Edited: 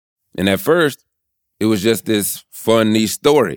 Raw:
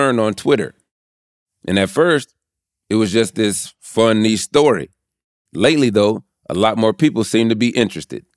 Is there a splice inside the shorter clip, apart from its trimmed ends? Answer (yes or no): no